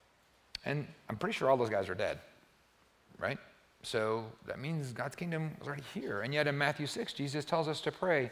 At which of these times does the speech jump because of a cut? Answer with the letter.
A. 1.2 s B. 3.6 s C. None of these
C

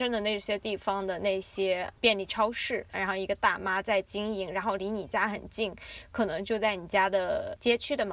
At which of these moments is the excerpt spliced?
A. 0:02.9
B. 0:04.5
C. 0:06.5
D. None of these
A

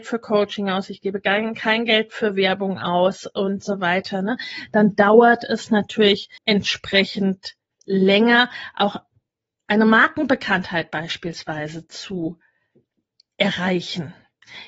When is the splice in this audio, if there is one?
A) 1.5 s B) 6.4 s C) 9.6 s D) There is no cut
B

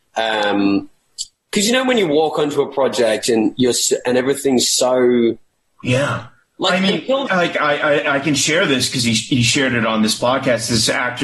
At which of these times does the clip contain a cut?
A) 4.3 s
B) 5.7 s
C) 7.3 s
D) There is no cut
C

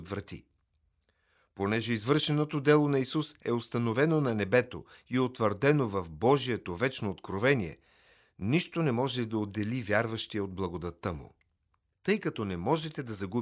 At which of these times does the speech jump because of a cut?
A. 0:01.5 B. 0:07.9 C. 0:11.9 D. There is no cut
C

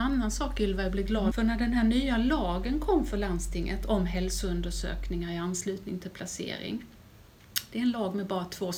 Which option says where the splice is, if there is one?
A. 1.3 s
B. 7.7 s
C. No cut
A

